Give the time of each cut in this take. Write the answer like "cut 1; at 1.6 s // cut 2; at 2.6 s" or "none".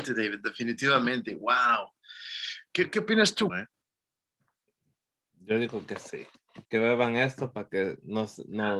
cut 1; at 3.5 s // cut 2; at 6.6 s